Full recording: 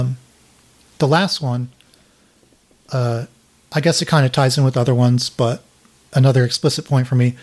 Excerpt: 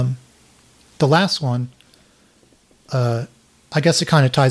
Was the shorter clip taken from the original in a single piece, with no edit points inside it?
yes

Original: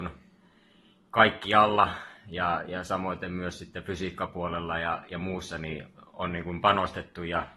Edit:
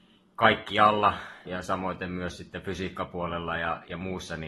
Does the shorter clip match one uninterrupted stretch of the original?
no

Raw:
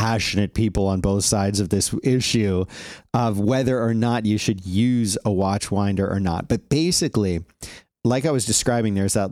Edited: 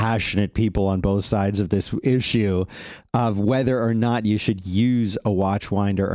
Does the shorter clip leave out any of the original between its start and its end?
no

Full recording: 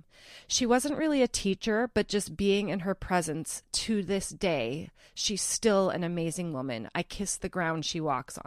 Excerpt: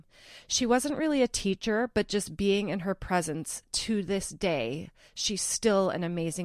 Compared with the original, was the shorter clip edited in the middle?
no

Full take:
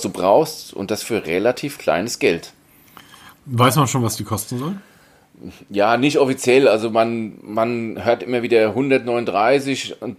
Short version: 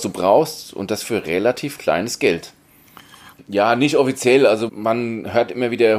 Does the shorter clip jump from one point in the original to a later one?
yes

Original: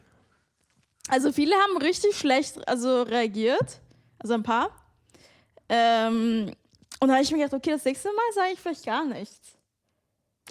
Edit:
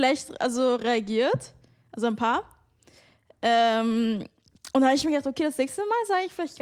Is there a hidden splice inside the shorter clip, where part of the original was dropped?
no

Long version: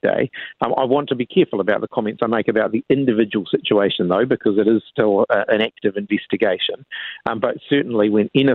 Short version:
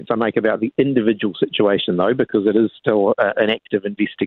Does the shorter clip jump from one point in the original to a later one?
no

